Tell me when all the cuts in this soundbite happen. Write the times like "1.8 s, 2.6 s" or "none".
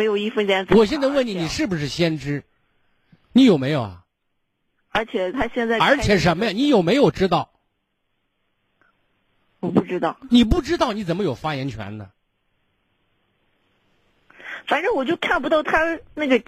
3.2 s